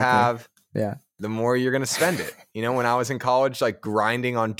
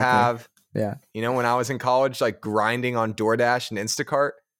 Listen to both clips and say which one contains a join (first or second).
second